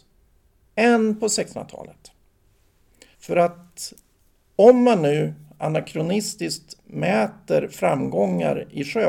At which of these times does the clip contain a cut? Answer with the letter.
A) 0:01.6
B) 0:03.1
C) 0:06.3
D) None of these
B